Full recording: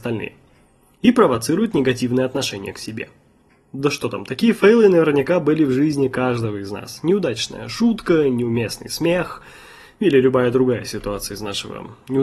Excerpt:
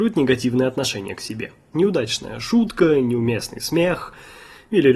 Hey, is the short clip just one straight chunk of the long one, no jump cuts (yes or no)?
no